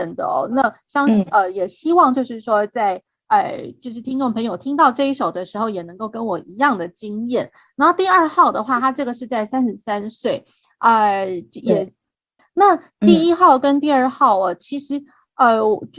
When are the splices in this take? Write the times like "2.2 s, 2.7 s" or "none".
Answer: 12.4 s